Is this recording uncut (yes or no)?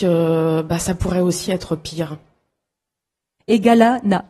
no